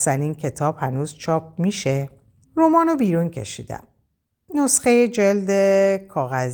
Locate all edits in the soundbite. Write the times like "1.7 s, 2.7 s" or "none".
2.4 s